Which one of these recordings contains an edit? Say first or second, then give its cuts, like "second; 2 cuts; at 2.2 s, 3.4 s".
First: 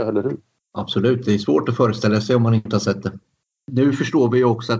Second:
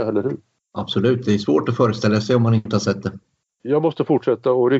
second; 1 cut; at 3.5 s